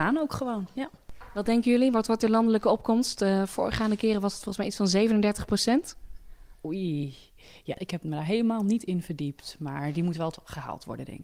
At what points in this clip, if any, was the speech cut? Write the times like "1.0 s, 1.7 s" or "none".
7.8 s